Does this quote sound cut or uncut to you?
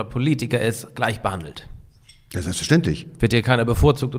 uncut